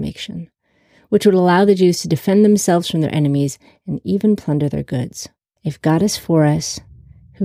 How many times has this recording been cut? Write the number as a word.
one